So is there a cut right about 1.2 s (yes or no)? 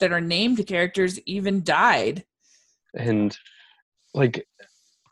no